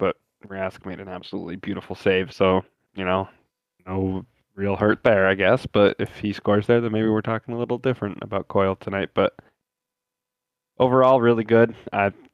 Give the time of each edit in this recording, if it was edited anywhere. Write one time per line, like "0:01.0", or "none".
none